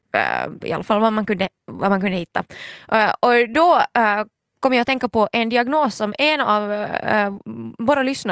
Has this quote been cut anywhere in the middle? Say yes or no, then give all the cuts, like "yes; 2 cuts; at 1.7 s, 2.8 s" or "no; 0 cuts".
no; 0 cuts